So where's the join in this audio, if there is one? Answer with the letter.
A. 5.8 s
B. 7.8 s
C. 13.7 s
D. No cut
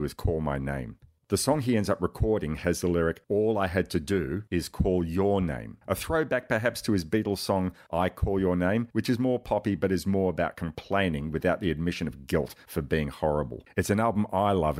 C